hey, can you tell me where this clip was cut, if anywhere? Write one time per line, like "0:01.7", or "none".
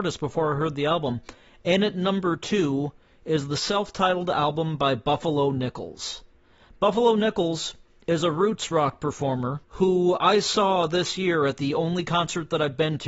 0:09.6